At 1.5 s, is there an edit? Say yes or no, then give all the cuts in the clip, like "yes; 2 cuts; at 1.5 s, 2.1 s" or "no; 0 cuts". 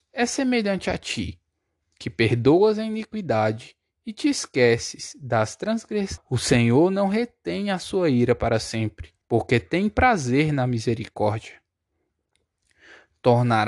no; 2 cuts; at 6.2 s, 9.2 s